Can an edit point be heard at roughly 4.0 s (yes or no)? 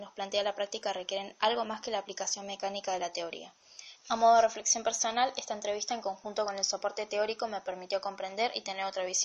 yes